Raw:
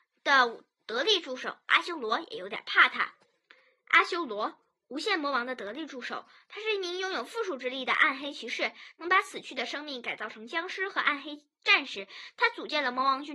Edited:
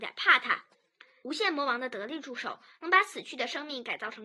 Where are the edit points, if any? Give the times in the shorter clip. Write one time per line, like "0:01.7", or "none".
0:01.2
0:02.8